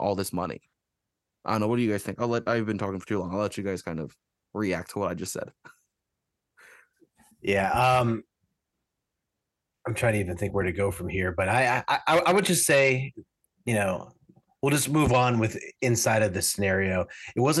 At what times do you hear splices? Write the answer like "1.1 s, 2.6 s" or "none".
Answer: none